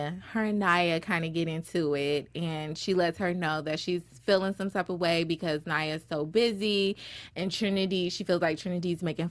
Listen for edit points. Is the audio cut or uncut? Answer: uncut